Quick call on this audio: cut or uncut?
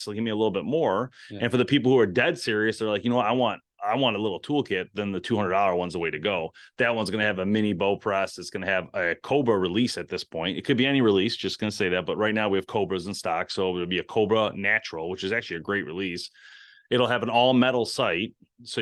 uncut